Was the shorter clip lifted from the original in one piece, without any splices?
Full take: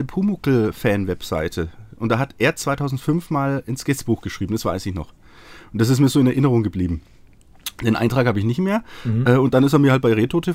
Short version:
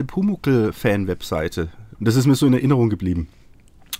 no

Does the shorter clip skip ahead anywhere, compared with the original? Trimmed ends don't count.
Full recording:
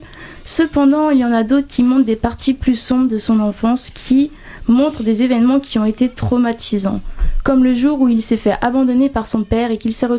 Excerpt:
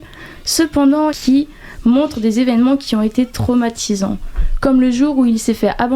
yes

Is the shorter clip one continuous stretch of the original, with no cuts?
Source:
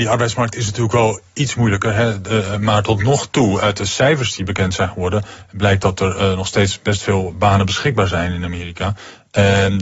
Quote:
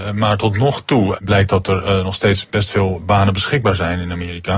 no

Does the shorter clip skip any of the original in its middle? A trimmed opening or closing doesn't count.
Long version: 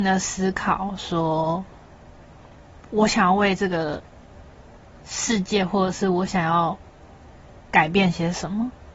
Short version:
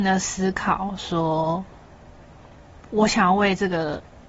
no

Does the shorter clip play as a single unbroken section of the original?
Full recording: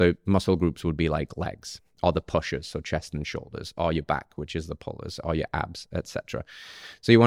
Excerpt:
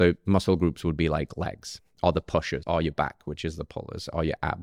no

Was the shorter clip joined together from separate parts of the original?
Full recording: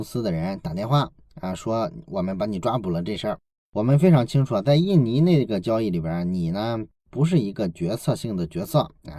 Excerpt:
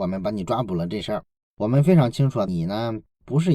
yes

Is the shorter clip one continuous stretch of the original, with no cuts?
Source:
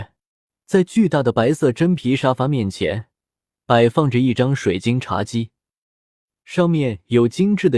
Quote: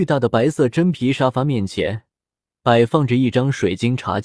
yes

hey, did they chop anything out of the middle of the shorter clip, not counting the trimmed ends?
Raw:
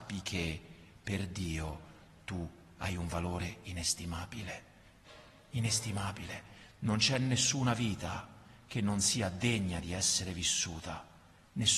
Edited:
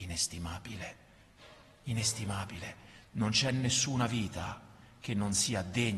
no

